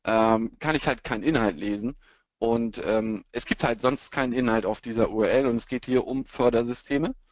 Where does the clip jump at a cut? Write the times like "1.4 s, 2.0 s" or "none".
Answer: none